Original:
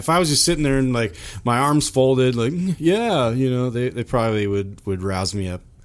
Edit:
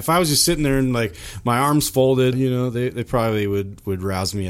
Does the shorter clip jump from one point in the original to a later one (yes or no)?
yes